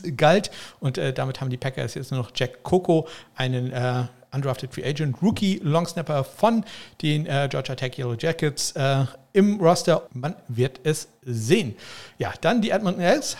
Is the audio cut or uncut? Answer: cut